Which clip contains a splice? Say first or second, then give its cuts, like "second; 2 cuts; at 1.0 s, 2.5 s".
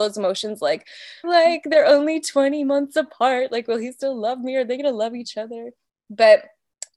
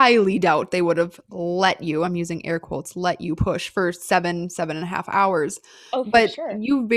first; 1 cut; at 1.2 s